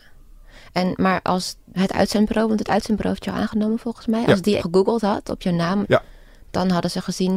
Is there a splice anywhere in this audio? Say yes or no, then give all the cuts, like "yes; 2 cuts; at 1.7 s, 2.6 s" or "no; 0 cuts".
yes; 3 cuts; at 1.7 s, 4.6 s, 5.8 s